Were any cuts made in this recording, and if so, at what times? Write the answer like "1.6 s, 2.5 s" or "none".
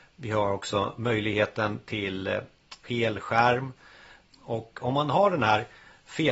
2.8 s, 4.3 s